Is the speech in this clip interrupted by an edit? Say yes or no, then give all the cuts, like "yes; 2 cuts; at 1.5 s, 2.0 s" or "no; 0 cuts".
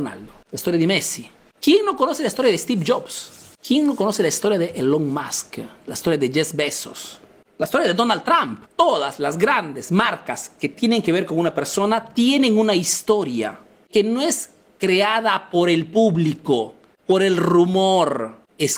yes; 1 cut; at 8.7 s